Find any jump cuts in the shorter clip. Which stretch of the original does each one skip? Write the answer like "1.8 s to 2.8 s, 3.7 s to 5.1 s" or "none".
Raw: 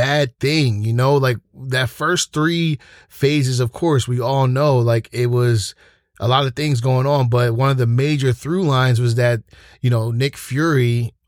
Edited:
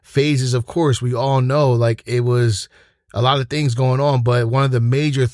none